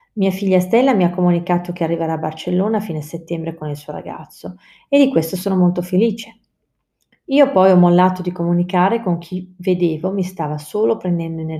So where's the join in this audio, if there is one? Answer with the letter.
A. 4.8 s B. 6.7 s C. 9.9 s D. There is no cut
D